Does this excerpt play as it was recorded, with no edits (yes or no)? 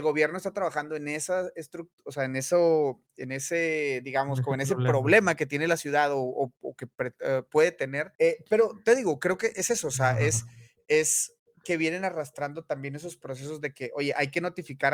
no